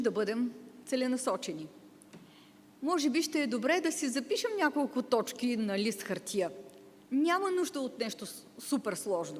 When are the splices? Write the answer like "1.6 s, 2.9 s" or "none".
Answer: 7.0 s